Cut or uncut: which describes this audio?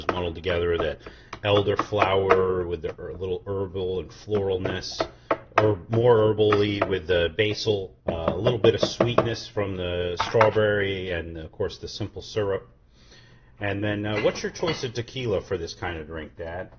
cut